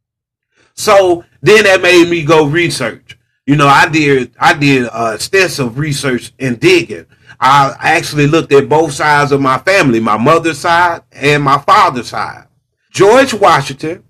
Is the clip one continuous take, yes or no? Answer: no